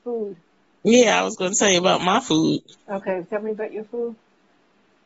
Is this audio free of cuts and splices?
yes; 0 cuts

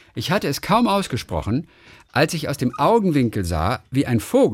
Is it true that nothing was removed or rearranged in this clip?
yes; 0 cuts

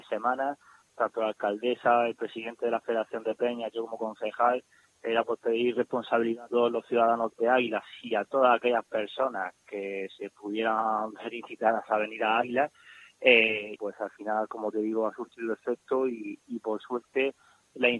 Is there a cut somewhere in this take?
yes; 1 cut; at 13.8 s

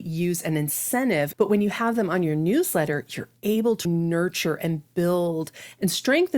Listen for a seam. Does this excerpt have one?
yes; 2 cuts; at 1.3 s, 3.9 s

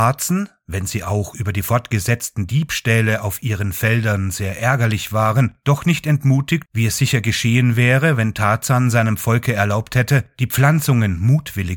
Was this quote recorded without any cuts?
no; 1 cut; at 6.7 s

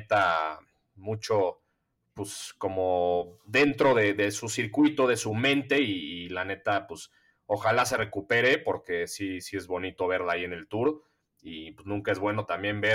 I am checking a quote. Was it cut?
no; 0 cuts

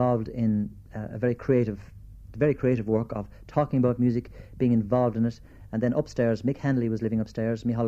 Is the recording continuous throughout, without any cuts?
no; 1 cut; at 5.7 s

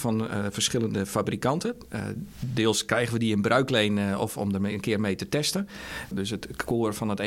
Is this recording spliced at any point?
yes; 1 cut; at 6.1 s

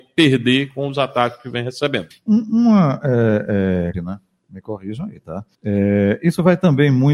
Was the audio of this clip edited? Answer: yes; 3 cuts; at 2.1 s, 3.9 s, 5.5 s

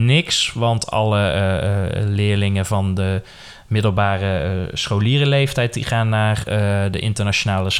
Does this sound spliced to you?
no; 0 cuts

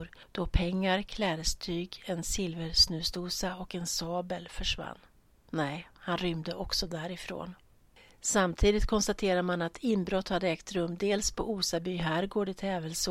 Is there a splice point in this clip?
yes; 1 cut; at 5.4 s

